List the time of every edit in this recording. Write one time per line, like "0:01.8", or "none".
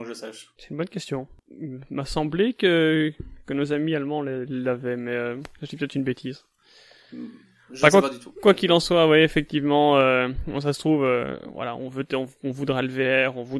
none